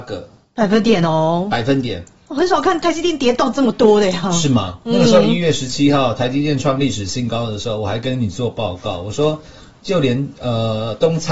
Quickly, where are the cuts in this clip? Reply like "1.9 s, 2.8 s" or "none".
none